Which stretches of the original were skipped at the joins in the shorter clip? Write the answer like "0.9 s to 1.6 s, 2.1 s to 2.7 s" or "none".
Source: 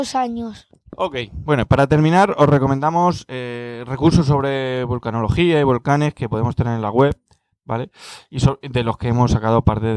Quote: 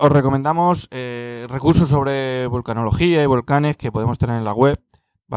none